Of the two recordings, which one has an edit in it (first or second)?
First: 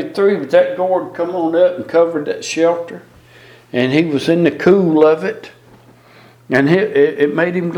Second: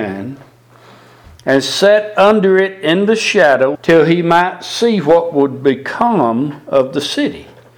second